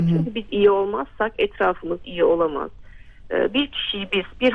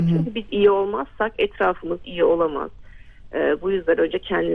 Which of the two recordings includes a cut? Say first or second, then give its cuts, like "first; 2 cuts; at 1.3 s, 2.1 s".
first; 1 cut; at 3.3 s